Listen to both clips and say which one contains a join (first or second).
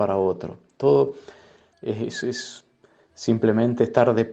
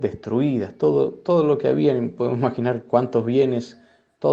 first